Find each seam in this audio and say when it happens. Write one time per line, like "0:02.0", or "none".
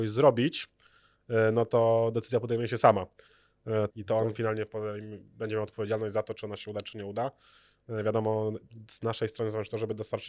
0:03.9